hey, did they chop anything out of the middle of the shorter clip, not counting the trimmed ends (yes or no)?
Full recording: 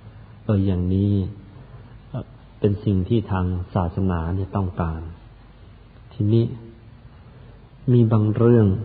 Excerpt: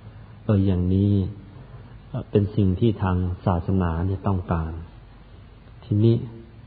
yes